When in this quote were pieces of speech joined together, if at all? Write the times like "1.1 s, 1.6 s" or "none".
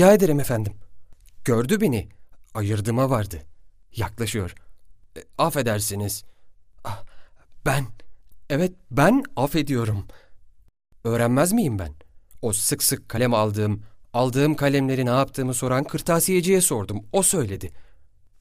1.4 s